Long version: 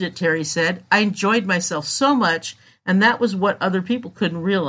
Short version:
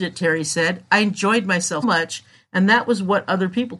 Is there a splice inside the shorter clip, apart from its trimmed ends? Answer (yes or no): yes